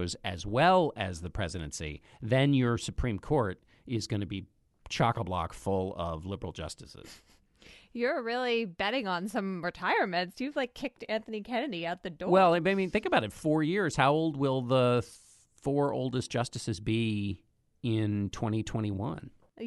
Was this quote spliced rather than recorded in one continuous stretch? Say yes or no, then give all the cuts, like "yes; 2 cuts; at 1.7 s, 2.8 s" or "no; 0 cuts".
no; 0 cuts